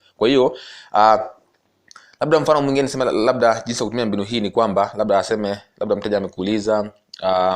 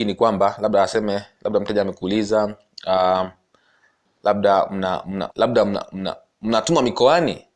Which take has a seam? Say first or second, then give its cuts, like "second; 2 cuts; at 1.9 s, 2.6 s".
second; 1 cut; at 5.3 s